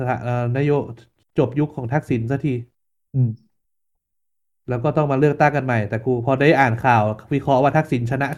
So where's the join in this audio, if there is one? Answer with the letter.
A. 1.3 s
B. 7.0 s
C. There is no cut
C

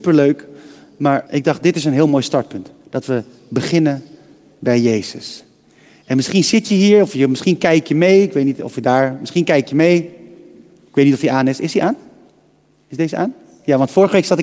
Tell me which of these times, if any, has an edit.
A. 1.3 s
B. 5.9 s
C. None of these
A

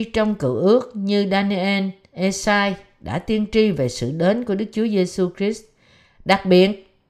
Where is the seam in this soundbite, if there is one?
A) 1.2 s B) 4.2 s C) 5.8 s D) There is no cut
D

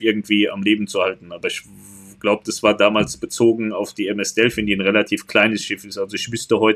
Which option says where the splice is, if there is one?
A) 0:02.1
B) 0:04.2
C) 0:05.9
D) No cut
D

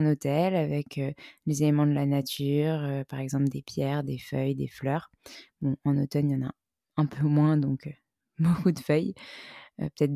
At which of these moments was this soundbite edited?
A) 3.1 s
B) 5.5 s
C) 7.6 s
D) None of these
D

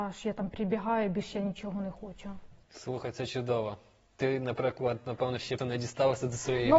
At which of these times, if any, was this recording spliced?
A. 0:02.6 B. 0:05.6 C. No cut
B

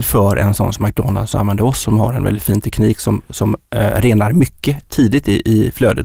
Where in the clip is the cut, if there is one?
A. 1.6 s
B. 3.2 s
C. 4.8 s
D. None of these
D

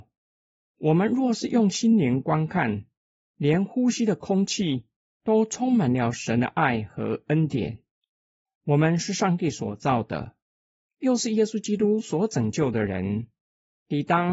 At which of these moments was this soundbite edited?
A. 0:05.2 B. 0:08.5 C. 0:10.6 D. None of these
D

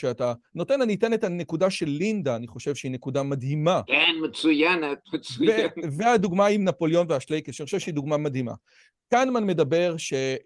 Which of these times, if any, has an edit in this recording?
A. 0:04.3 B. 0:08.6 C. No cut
C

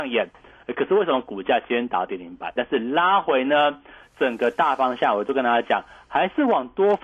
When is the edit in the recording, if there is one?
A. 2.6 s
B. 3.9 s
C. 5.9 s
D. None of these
A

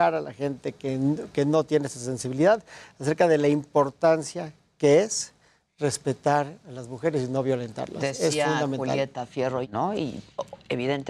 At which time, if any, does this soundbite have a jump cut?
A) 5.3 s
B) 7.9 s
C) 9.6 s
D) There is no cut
C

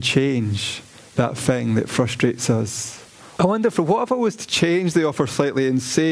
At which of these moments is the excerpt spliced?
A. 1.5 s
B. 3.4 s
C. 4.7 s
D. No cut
B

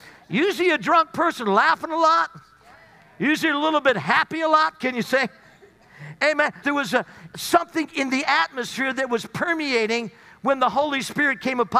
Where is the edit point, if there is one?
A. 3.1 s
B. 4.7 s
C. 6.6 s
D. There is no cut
C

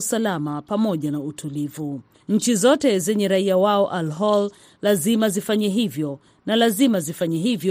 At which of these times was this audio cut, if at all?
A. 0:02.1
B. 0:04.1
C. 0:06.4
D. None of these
A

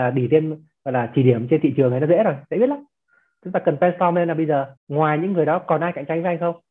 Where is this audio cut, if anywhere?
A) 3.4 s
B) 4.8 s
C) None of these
B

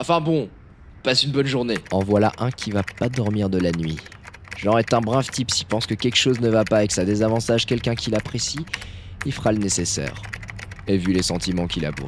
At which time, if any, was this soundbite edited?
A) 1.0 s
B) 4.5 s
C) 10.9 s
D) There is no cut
A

